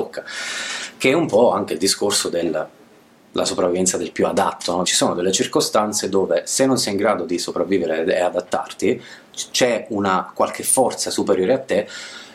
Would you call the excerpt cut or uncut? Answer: cut